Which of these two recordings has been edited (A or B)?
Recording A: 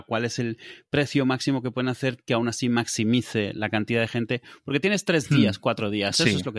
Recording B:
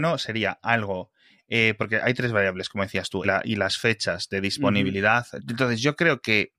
B